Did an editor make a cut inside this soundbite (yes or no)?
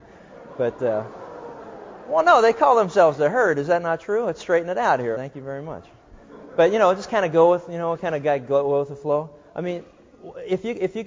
yes